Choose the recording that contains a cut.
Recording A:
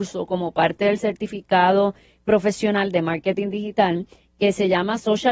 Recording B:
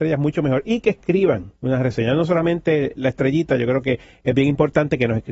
B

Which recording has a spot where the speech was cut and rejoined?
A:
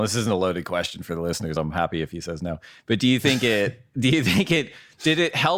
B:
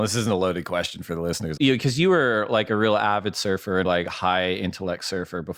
B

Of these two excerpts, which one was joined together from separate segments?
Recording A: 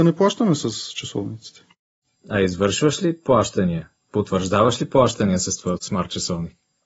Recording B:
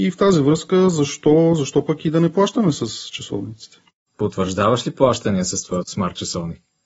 B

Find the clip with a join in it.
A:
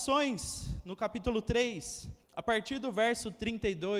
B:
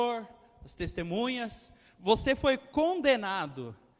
A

